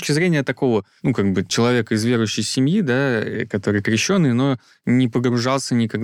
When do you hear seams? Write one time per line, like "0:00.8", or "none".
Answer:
0:01.5